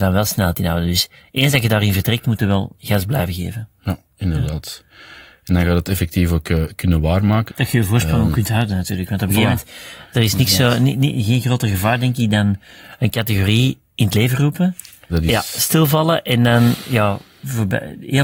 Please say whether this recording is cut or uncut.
cut